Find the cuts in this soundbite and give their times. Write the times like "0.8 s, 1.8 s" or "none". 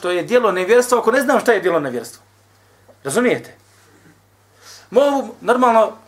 none